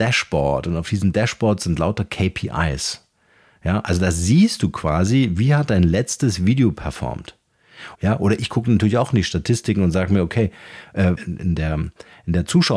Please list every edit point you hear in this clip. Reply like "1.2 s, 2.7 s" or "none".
7.9 s, 11.2 s